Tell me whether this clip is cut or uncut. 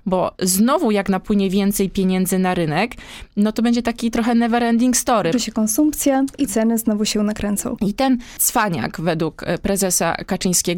cut